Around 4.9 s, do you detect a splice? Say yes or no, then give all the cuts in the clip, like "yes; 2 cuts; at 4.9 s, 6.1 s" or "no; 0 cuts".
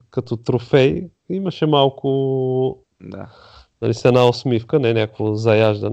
no; 1 cut; at 2.8 s